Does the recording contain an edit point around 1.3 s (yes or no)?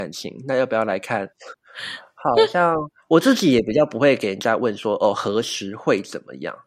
yes